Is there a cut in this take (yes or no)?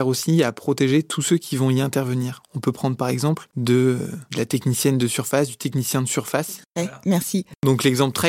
yes